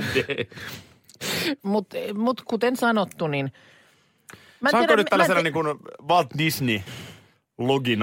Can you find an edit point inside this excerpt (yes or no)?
yes